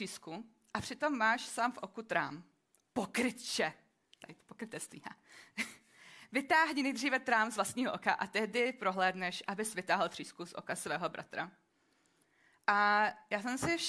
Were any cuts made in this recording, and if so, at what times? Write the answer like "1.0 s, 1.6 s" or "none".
none